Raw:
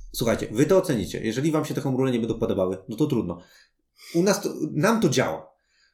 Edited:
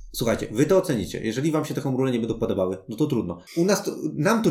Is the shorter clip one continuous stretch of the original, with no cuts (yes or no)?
no